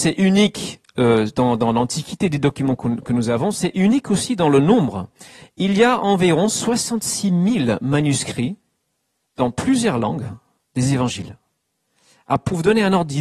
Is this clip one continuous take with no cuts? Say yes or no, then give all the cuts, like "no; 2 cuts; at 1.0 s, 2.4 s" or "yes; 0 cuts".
yes; 0 cuts